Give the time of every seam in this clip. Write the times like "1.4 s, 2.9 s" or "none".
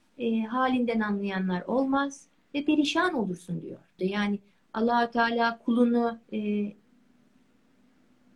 4.0 s, 6.2 s